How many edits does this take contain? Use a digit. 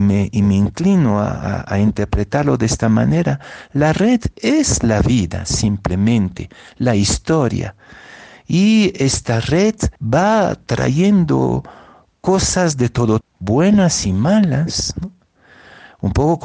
2